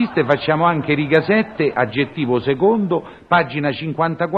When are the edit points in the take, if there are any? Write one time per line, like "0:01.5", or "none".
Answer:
none

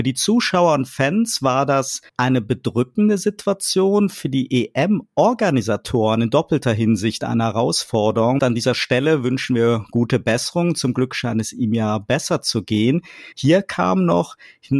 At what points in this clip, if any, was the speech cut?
0:02.1
0:08.4
0:13.3

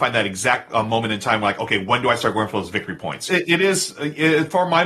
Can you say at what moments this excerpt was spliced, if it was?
0:03.3

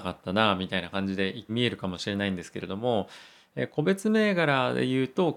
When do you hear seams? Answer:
0:01.5

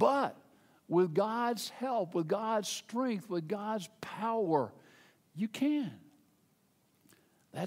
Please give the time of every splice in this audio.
none

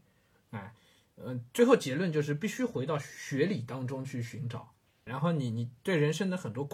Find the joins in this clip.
0:05.1

